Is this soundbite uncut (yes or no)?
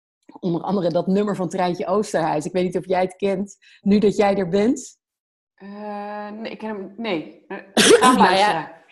yes